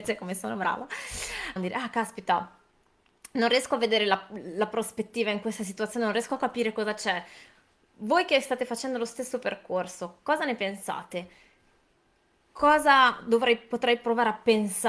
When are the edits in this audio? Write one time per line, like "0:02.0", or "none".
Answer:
0:01.6